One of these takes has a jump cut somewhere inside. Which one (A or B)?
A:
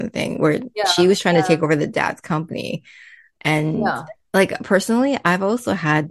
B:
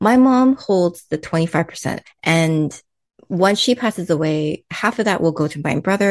B